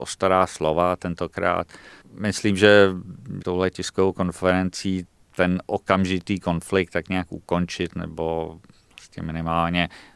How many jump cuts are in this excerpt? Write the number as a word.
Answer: two